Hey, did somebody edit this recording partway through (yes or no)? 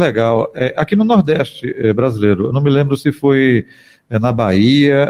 no